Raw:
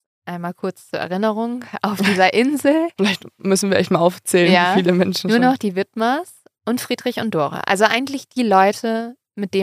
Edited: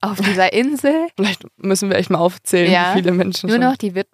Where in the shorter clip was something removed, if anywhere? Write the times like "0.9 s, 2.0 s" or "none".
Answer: none